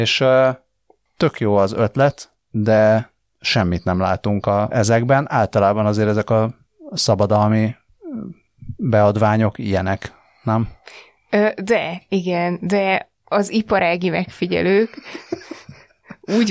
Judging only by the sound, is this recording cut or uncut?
cut